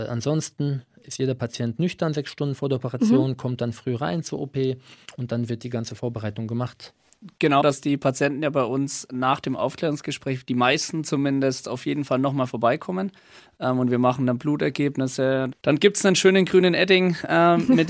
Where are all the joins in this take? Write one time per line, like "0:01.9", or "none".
0:07.6
0:15.5